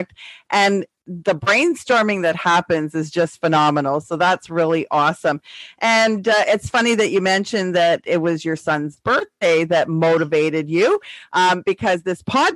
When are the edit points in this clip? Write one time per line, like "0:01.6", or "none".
none